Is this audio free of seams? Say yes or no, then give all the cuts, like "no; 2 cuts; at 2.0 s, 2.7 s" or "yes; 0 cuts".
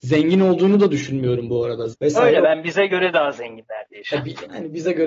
no; 1 cut; at 1.9 s